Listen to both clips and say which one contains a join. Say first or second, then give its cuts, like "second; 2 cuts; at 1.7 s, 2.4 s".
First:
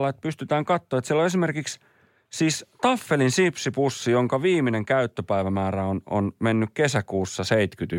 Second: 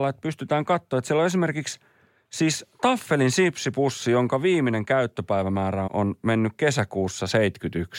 second; 1 cut; at 5.9 s